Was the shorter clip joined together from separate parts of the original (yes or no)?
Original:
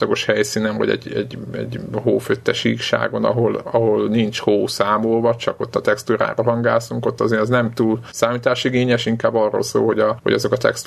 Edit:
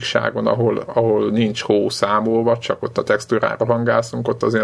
no